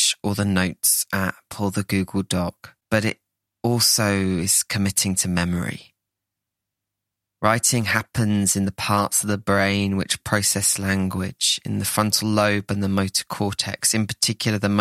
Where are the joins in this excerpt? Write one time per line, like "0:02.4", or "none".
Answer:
0:02.8